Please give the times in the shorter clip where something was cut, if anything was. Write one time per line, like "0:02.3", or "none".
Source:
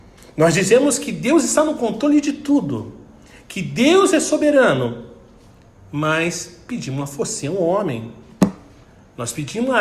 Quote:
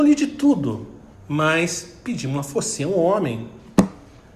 0:01.1